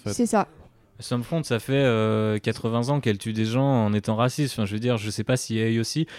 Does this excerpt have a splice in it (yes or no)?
no